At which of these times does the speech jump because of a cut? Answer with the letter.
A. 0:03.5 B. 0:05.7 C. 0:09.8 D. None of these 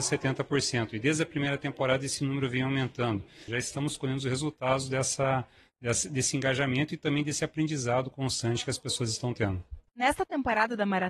A